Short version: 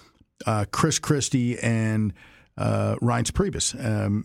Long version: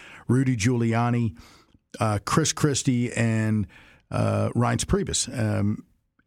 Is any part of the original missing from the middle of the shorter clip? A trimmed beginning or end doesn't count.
no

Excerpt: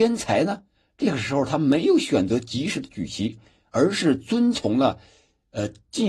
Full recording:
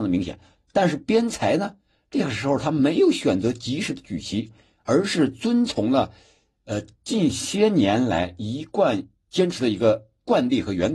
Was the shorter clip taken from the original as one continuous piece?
yes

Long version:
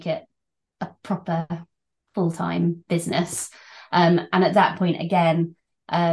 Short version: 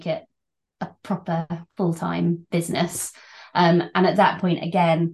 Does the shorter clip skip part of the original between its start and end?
yes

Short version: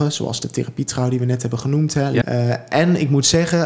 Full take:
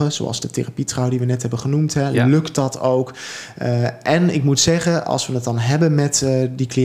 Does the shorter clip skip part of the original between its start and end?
yes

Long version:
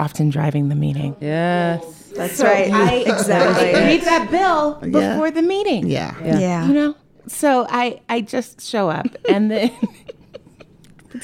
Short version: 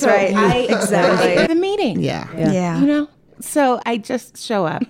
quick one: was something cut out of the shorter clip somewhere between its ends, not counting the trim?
yes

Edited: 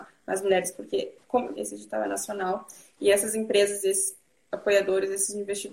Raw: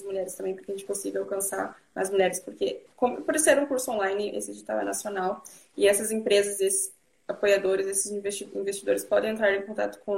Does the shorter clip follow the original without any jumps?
no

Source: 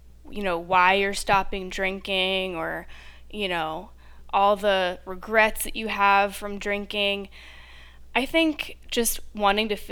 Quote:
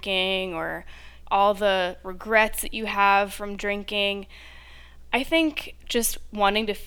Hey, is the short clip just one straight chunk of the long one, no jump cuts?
no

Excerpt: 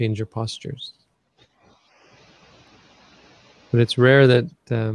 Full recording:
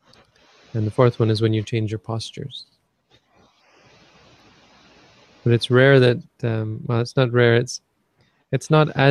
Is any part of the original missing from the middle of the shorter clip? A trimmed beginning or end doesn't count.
no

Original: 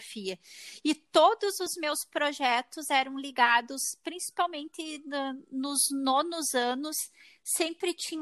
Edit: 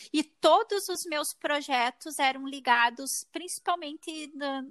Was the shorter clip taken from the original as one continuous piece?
yes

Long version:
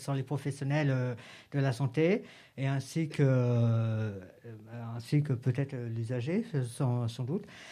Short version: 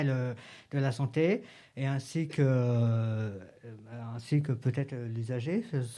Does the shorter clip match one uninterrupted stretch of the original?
yes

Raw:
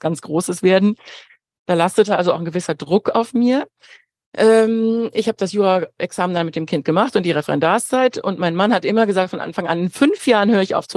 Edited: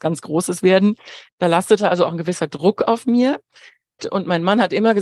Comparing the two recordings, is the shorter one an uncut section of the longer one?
no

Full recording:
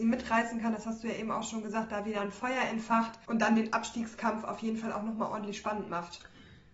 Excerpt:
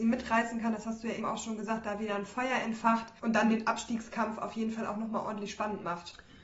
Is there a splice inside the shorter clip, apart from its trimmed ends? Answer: yes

